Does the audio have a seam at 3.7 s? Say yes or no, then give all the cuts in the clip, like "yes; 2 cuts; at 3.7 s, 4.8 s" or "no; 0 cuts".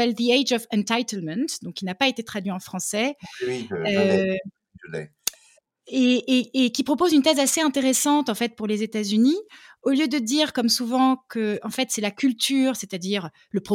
no; 0 cuts